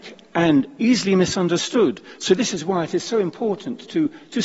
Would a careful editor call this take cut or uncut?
uncut